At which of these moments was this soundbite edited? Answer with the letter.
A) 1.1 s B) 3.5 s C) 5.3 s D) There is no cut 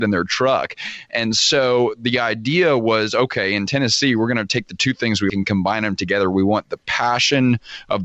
C